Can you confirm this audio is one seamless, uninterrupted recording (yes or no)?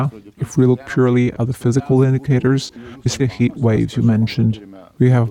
no